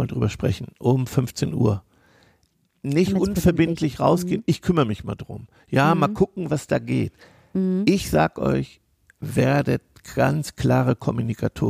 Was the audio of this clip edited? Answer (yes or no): no